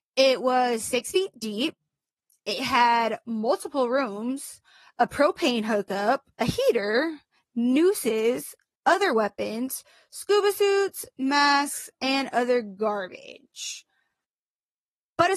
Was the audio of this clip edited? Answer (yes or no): yes